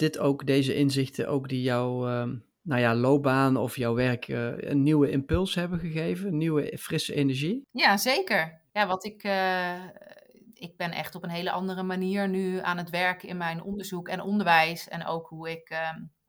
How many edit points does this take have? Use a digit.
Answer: 1